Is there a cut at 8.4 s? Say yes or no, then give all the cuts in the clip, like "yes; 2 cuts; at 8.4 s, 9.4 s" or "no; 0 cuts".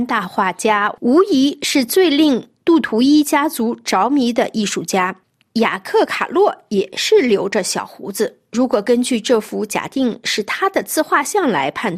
no; 1 cut; at 5.4 s